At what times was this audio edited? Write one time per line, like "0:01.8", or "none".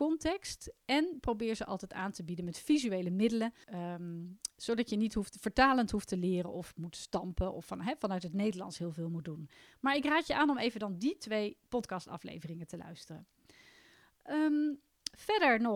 0:03.6